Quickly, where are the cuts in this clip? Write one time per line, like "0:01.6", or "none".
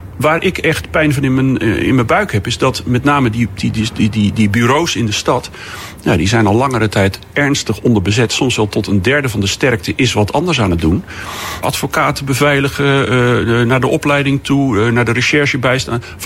0:03.6
0:11.6